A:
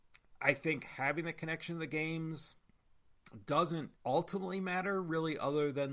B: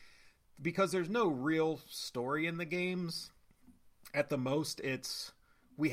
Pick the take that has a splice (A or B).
A